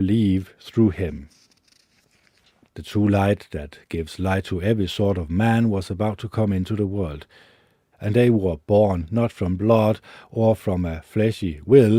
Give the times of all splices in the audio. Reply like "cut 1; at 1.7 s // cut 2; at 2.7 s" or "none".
cut 1; at 2.7 s // cut 2; at 7.9 s